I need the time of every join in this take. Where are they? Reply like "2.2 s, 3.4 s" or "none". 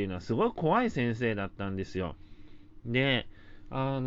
none